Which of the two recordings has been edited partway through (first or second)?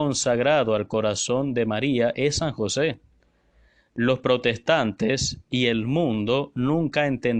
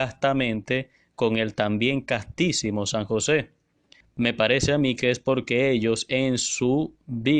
second